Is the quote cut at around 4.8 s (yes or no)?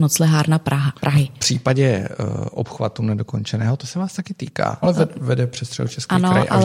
yes